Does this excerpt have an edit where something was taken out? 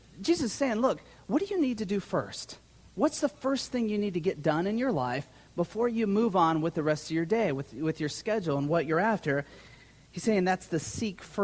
no; 0 cuts

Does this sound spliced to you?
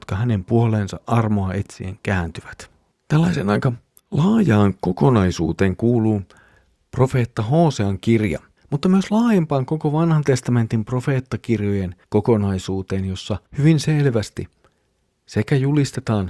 yes; 3 cuts; at 8.6 s, 12.0 s, 13.5 s

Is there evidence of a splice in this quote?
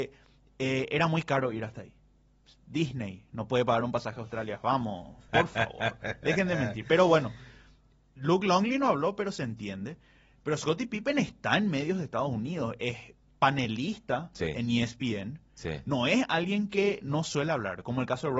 yes; 1 cut; at 5.3 s

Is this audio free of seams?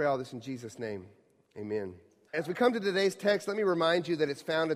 no; 1 cut; at 2.3 s

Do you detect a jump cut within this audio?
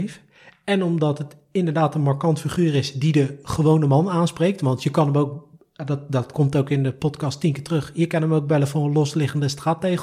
no; 0 cuts

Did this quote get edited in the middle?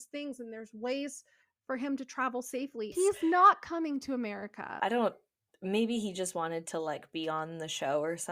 yes; 2 cuts; at 2.9 s, 4.8 s

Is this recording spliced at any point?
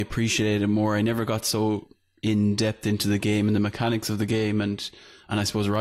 no; 0 cuts

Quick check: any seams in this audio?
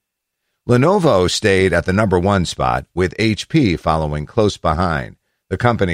no; 0 cuts

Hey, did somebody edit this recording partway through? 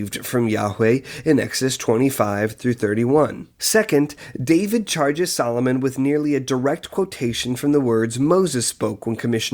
yes; 1 cut; at 3.5 s

